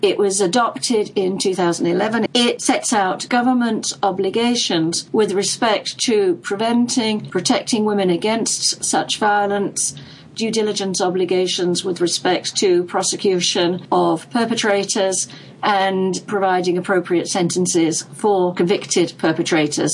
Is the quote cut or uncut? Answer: cut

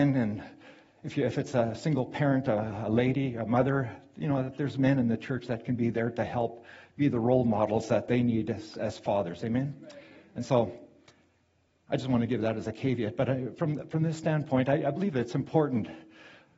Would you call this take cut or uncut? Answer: uncut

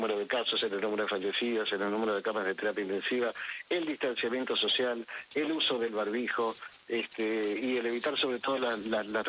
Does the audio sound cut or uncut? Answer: uncut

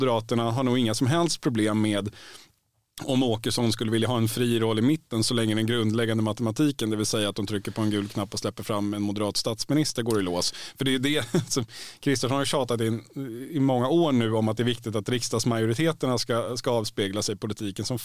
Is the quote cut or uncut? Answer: uncut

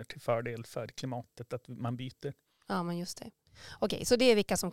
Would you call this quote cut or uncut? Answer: uncut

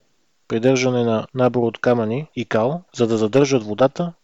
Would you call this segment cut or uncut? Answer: cut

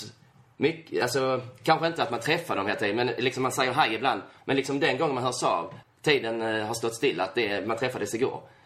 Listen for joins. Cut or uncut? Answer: cut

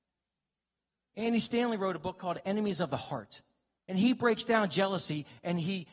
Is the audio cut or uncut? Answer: cut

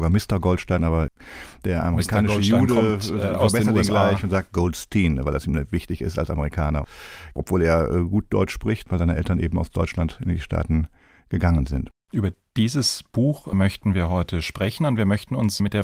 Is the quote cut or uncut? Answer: uncut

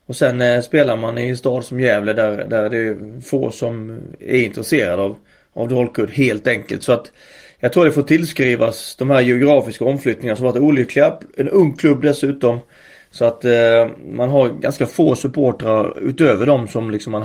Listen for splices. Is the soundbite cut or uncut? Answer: uncut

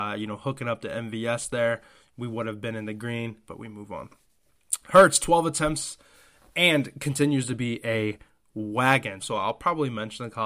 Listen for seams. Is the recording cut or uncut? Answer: cut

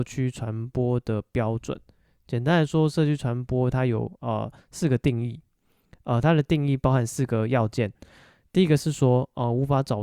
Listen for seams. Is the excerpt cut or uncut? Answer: uncut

